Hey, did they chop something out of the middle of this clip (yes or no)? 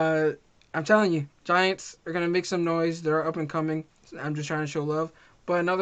yes